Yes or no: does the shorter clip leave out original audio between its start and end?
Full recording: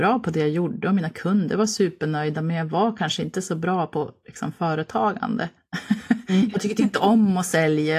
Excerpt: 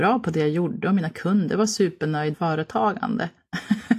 yes